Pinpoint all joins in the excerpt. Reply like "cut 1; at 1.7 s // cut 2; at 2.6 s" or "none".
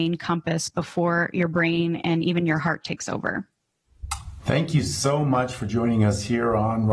cut 1; at 4.4 s